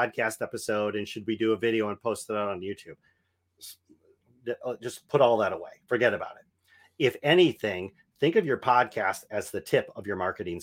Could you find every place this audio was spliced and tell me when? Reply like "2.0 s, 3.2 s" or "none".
none